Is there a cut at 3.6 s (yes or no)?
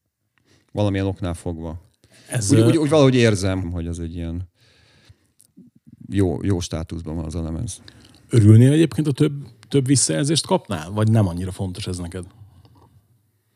yes